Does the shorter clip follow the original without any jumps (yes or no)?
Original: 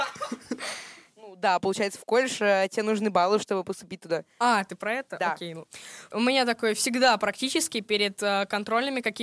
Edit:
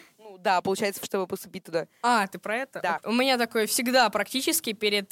no